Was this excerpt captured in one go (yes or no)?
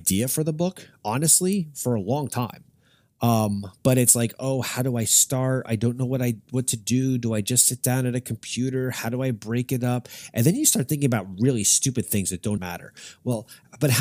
no